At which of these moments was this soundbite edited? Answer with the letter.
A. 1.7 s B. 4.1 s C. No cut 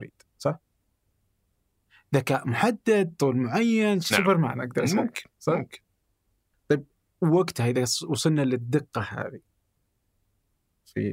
B